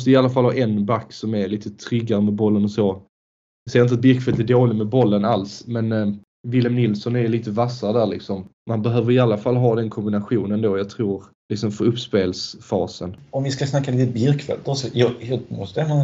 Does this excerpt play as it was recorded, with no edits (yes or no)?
yes